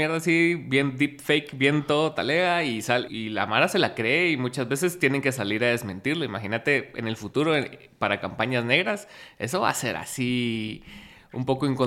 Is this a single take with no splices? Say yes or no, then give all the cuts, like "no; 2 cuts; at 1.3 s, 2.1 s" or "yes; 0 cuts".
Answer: no; 1 cut; at 3.1 s